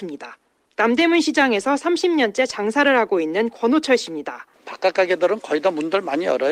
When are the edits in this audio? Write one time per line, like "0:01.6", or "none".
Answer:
0:04.5